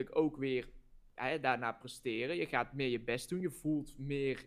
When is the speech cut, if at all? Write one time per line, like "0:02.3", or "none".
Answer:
none